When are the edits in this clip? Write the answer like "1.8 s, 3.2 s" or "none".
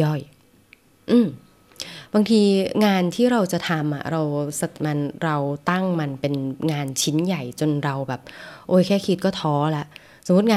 4.7 s